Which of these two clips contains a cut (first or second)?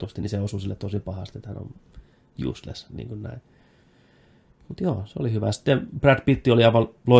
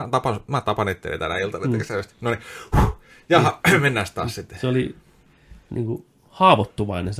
second